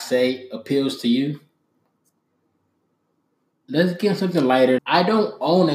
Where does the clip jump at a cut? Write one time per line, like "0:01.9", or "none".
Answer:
0:03.5
0:04.8